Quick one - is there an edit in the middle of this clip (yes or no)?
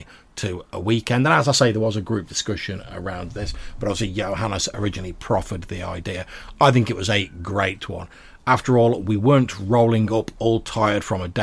no